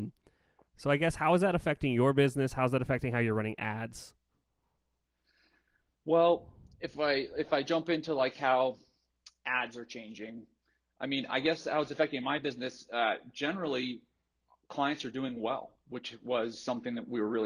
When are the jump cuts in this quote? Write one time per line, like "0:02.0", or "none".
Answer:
none

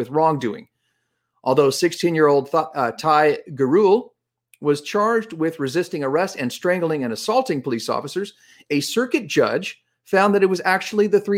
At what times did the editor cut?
none

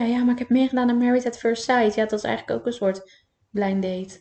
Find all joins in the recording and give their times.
none

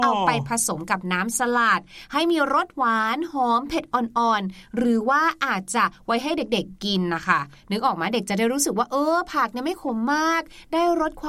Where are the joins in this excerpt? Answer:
none

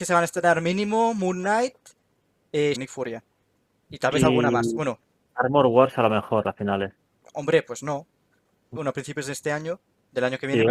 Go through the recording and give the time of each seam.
0:02.7
0:07.2
0:08.8

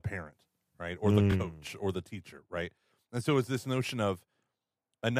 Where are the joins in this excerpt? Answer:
none

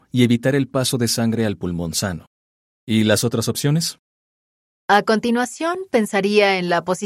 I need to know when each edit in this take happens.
0:02.7

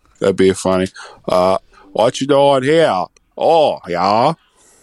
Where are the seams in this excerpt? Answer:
0:03.8

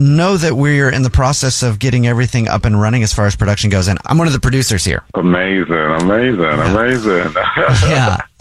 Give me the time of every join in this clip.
0:05.1

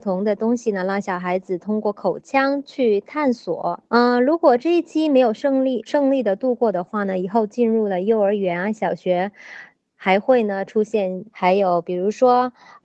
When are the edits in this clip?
0:03.9
0:05.9
0:11.3

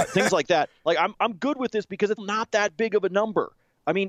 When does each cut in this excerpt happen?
0:01.1
0:02.2

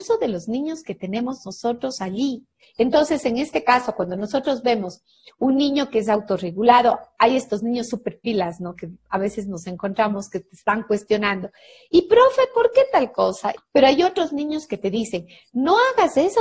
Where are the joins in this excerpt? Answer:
0:02.6
0:13.6

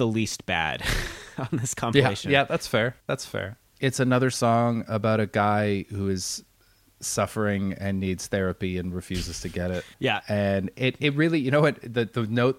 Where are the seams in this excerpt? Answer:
0:09.9

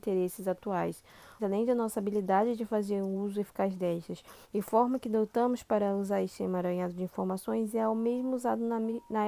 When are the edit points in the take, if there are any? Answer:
0:01.4
0:04.4

